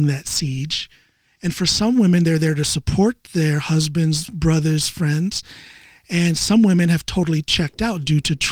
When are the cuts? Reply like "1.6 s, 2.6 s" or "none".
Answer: none